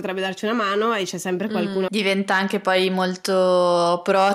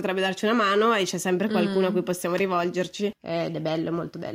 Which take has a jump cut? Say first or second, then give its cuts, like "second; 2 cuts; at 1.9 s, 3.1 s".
first; 1 cut; at 1.9 s